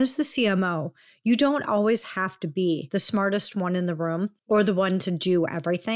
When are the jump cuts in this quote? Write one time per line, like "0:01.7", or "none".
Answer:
0:04.4